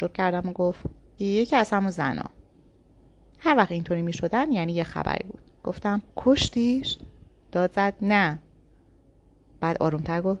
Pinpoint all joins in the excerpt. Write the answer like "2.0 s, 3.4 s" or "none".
1.2 s, 6.1 s